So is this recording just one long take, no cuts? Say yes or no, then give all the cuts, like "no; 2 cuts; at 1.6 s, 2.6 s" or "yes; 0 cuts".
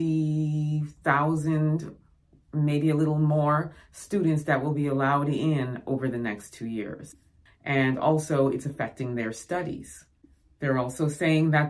no; 1 cut; at 7.5 s